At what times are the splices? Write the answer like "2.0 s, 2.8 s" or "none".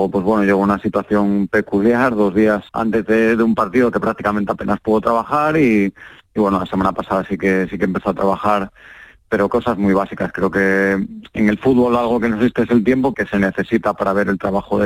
2.7 s, 13.1 s